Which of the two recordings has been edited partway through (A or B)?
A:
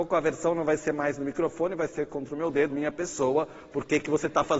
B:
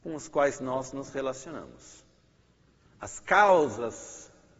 A